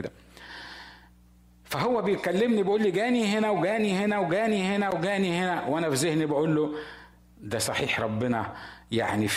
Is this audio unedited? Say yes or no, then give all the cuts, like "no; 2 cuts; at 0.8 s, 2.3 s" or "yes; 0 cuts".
yes; 0 cuts